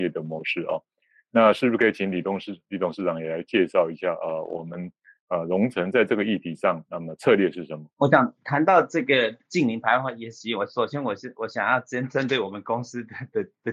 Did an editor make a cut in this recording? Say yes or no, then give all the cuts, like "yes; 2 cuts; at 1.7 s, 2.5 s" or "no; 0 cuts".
yes; 1 cut; at 7.9 s